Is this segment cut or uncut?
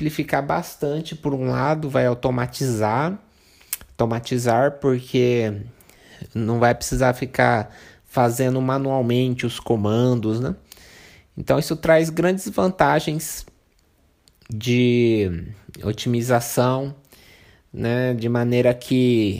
uncut